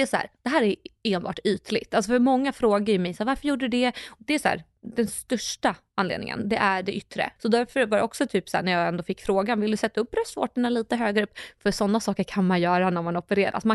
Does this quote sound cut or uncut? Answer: cut